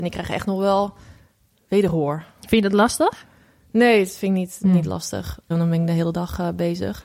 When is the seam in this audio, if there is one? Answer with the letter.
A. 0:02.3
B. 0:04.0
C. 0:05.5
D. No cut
C